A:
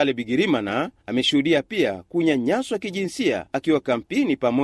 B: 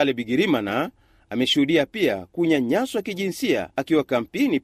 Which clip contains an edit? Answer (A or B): A